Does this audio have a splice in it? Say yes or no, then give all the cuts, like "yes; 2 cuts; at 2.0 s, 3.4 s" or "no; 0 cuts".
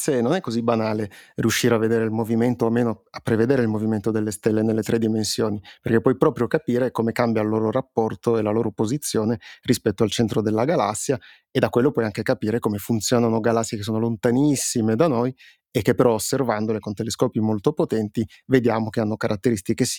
no; 0 cuts